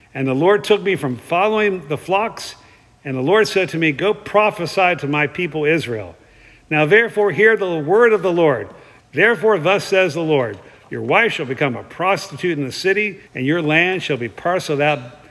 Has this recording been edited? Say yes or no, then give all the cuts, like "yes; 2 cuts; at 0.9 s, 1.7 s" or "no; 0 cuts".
yes; 2 cuts; at 9.0 s, 13.3 s